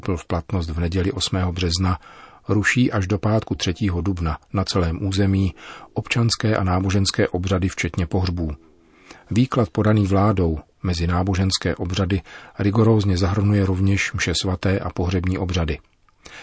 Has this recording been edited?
no; 0 cuts

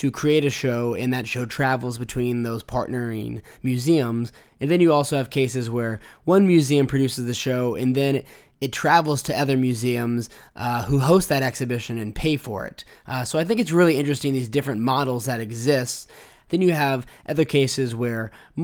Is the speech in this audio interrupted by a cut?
yes; 1 cut; at 16.5 s

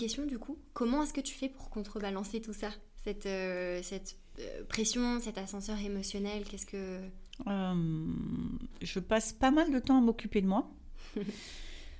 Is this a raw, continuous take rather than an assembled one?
yes; 0 cuts

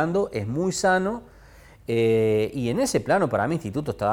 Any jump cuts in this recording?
no; 0 cuts

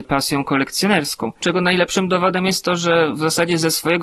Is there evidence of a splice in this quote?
yes; 1 cut; at 1.4 s

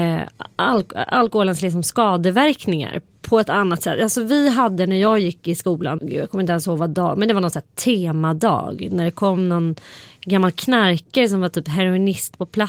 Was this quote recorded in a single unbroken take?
no; 1 cut; at 6.0 s

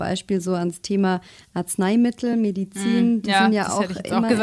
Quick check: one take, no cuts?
yes; 0 cuts

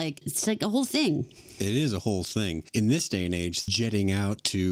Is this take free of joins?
no; 1 cut; at 3.7 s

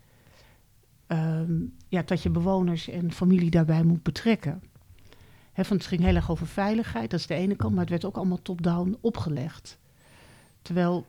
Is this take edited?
no; 0 cuts

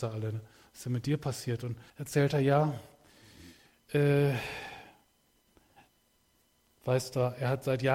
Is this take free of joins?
no; 1 cut; at 1.9 s

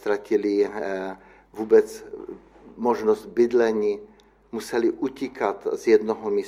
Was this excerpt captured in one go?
yes; 0 cuts

